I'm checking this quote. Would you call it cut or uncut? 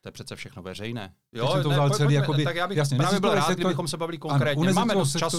cut